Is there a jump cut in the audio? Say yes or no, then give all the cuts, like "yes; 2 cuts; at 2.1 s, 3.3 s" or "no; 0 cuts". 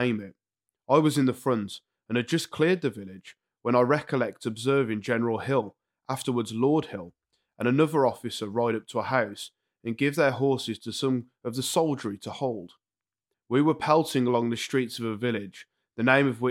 yes; 1 cut; at 13.3 s